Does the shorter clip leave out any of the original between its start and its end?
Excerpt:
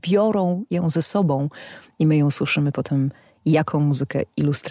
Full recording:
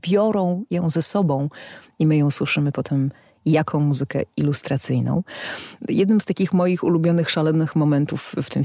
no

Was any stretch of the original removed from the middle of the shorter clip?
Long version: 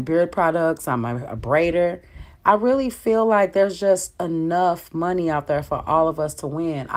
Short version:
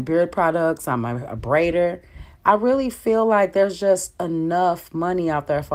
no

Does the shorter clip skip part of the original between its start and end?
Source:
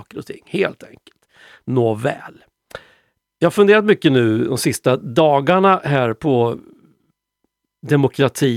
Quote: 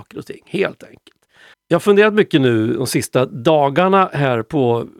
yes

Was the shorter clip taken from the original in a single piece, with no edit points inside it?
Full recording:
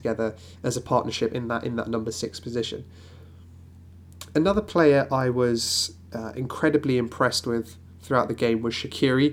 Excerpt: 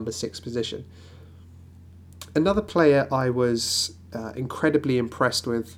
yes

